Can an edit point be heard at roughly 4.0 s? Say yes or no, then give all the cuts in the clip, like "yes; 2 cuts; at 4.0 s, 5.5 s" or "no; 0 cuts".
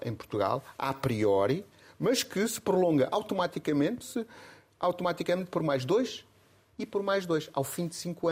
yes; 1 cut; at 4.0 s